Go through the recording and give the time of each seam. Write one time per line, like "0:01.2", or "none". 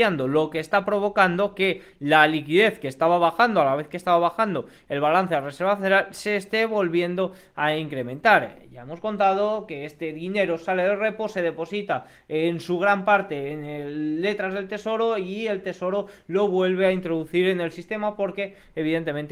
none